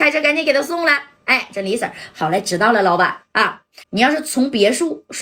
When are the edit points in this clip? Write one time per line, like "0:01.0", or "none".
0:03.8